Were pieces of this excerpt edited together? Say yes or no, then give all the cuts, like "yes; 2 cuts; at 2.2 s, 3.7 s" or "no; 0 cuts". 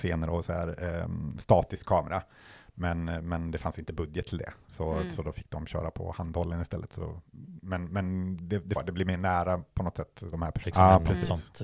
yes; 2 cuts; at 8.8 s, 10.6 s